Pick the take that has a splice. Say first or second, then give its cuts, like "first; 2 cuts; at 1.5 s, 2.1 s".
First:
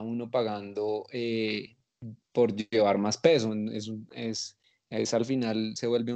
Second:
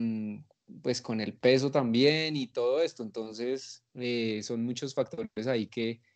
second; 1 cut; at 3.9 s